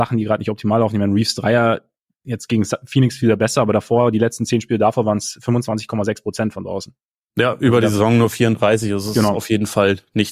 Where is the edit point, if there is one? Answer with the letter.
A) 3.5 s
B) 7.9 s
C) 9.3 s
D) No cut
D